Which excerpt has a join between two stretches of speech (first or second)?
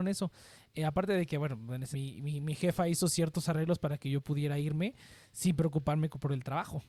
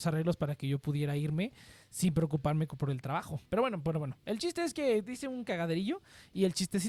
first